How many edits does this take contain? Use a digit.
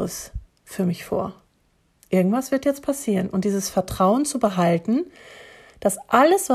0